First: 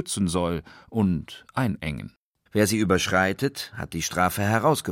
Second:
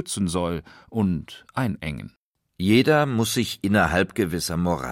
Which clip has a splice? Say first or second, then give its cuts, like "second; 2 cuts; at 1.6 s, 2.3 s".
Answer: first; 1 cut; at 2.5 s